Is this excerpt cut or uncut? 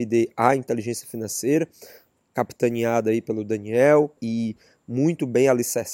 cut